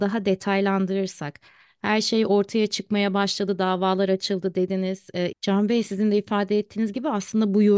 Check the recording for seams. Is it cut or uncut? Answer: cut